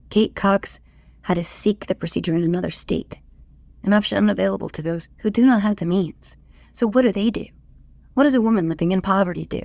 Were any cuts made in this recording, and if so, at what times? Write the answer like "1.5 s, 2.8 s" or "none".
none